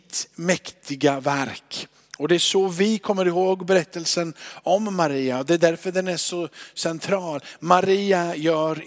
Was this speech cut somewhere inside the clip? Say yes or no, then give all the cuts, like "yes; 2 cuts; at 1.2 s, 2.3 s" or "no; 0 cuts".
no; 0 cuts